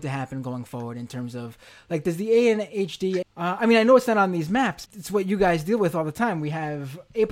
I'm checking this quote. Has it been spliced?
yes; 2 cuts; at 3.2 s, 4.9 s

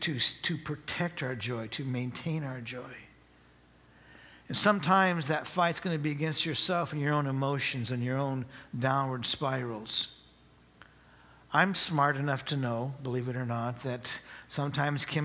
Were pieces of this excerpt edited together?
no; 0 cuts

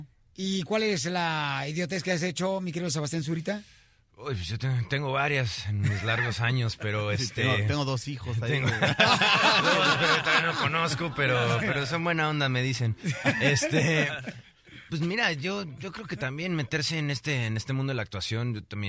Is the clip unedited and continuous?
yes; 0 cuts

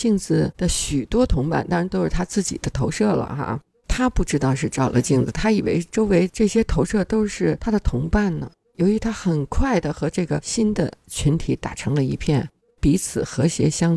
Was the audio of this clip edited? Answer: yes; 2 cuts; at 8.6 s, 12.7 s

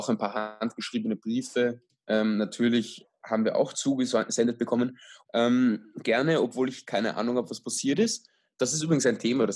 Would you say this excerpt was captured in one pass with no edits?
no; 1 cut; at 5.3 s

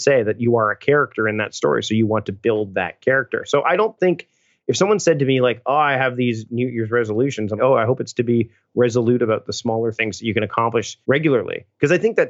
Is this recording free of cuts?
no; 2 cuts; at 7.6 s, 11.0 s

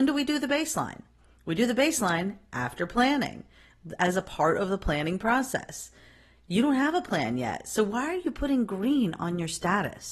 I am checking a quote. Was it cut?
no; 0 cuts

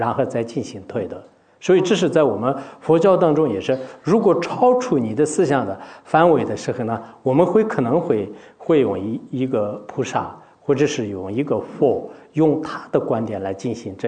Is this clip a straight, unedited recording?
yes; 0 cuts

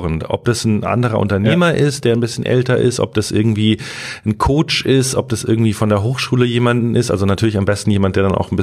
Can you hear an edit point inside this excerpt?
no; 0 cuts

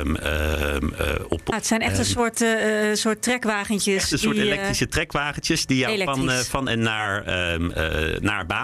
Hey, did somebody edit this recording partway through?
yes; 1 cut; at 1.5 s

